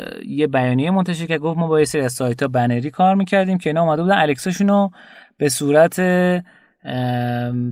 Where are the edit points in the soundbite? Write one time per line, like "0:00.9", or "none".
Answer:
none